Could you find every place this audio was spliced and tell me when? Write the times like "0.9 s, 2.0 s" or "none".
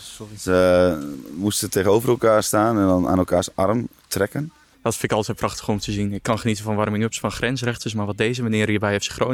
4.7 s